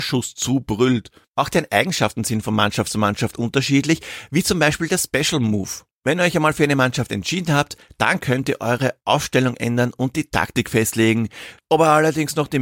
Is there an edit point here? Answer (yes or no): yes